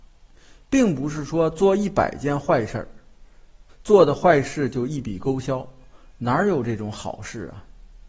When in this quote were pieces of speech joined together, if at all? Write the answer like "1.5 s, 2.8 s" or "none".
3.7 s